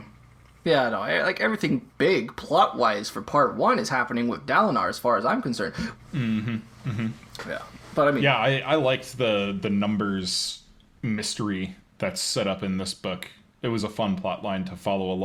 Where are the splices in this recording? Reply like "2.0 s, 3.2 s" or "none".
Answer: 6.0 s